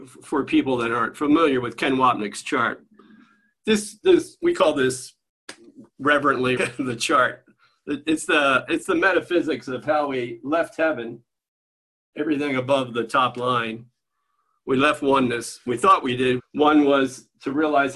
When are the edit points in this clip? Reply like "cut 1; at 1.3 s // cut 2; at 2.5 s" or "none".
cut 1; at 6.6 s // cut 2; at 16.4 s